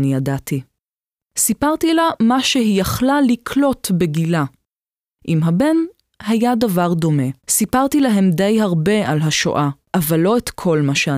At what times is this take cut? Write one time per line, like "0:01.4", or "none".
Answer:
0:01.2
0:07.4
0:09.8